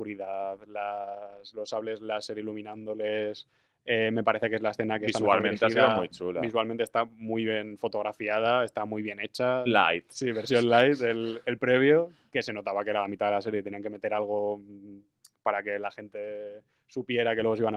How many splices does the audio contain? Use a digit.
1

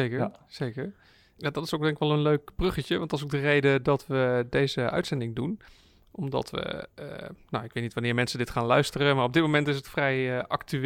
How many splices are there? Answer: 0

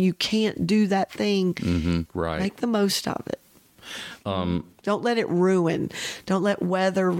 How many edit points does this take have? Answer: 1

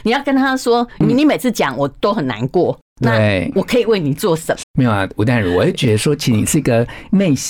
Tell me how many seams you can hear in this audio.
1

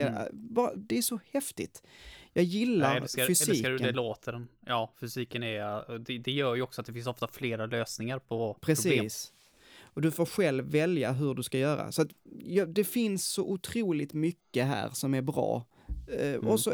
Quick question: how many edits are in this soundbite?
0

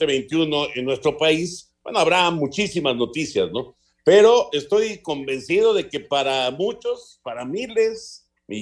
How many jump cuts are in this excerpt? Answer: 0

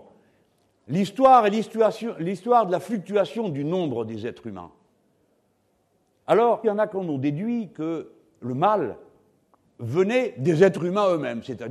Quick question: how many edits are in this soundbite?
2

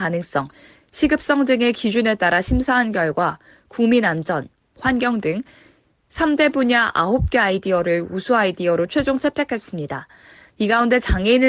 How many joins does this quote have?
1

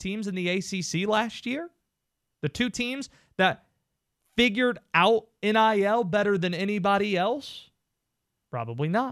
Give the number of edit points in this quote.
0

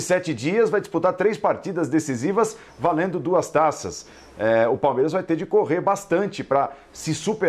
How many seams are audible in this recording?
0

